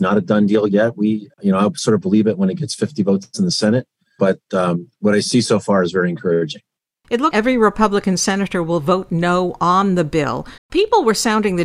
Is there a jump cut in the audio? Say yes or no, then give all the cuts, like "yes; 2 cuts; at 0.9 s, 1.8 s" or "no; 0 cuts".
yes; 2 cuts; at 7.3 s, 10.6 s